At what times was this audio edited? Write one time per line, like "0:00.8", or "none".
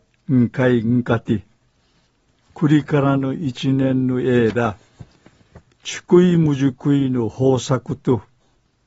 none